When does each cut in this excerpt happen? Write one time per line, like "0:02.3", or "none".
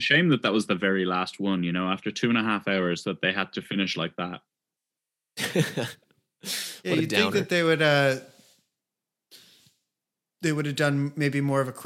none